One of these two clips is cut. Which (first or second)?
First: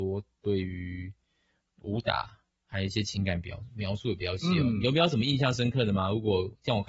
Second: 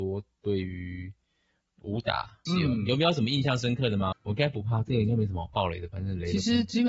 second